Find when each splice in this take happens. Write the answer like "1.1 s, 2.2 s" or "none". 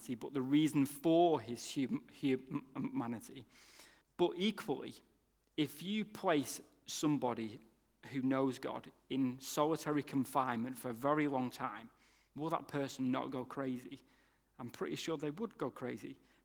4.0 s